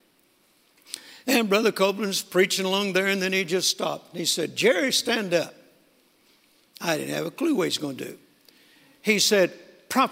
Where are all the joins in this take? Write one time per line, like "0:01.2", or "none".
none